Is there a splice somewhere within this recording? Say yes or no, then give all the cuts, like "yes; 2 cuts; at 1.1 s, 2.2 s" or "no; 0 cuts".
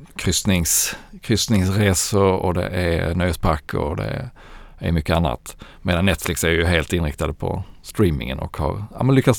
no; 0 cuts